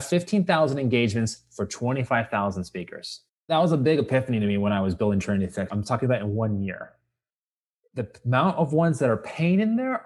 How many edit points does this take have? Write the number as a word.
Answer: two